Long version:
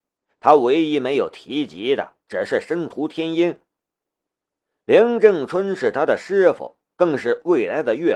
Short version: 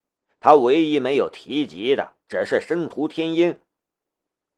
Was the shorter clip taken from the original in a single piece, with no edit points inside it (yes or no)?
yes